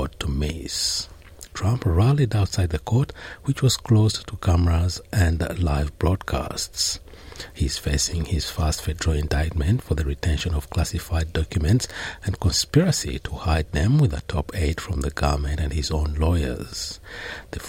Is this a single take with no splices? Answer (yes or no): no